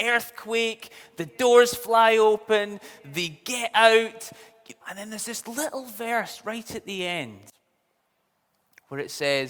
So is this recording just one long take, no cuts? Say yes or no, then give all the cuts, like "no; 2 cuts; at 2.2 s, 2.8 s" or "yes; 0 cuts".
no; 1 cut; at 4.8 s